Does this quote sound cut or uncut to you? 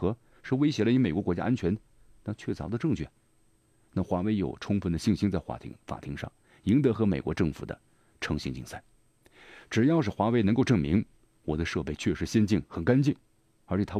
uncut